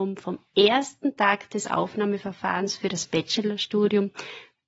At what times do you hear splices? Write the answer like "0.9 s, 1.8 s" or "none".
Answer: none